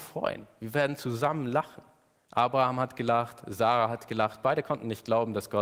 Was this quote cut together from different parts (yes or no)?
yes